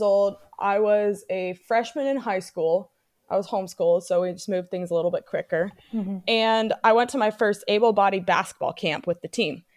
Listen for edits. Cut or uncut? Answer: uncut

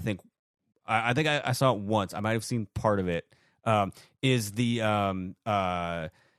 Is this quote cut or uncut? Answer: uncut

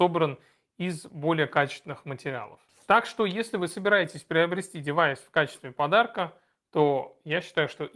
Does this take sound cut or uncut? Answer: uncut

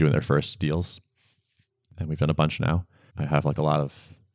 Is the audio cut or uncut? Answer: cut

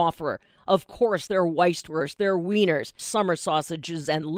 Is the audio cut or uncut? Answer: cut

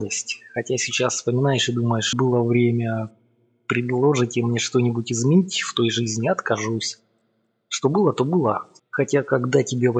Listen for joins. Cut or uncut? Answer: cut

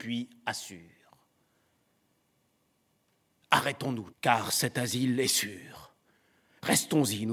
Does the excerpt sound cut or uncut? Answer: cut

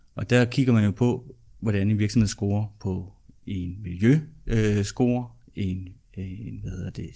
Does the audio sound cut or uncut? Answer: uncut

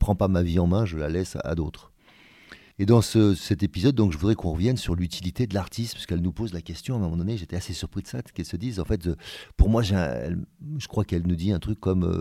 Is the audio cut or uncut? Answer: cut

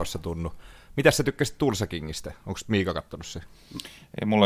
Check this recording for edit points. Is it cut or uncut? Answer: uncut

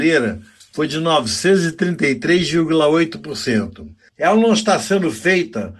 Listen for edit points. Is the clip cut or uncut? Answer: cut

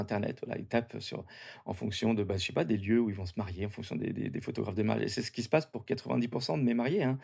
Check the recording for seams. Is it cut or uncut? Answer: uncut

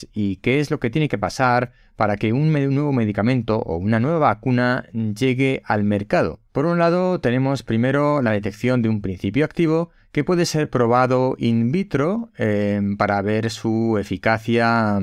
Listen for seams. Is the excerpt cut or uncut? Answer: cut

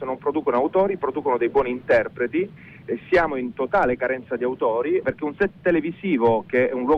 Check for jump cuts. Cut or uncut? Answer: cut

